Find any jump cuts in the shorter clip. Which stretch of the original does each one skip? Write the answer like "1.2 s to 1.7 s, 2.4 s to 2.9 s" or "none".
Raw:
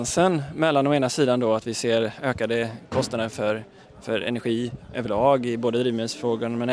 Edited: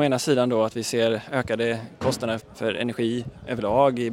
3.3 s to 3.9 s